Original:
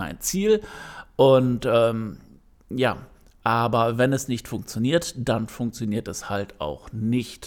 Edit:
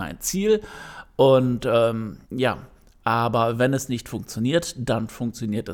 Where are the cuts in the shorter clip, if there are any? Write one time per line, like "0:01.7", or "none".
0:02.2